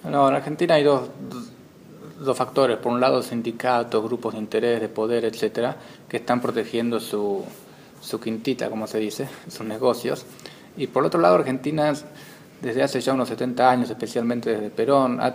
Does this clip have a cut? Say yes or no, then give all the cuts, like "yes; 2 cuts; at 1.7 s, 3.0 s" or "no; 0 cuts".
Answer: no; 0 cuts